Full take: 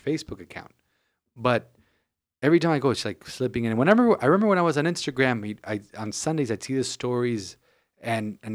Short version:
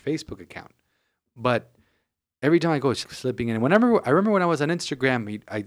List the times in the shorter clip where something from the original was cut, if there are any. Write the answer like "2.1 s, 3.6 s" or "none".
3.0 s